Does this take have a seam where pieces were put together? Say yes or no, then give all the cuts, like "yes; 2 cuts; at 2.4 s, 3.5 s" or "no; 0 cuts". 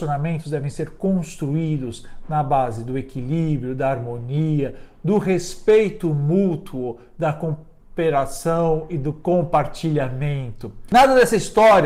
no; 0 cuts